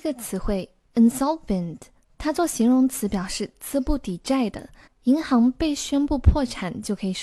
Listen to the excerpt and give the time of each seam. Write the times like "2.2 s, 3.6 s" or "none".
4.9 s